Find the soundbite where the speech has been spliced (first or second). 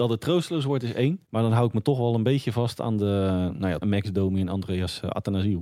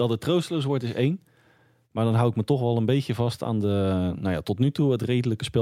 first